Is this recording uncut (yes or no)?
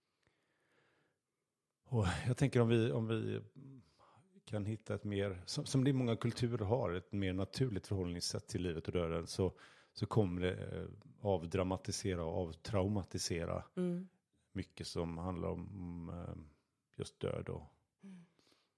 yes